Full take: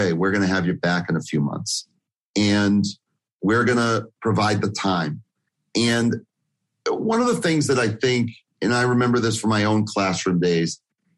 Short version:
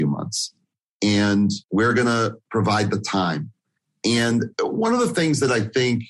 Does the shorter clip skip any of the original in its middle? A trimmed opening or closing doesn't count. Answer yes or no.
yes